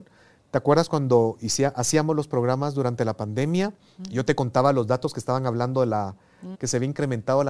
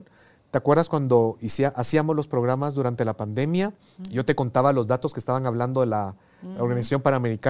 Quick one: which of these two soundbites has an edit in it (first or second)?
first